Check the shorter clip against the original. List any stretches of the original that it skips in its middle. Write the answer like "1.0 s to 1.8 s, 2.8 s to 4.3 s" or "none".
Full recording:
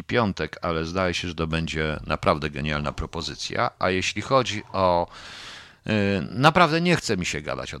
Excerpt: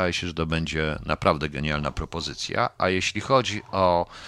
none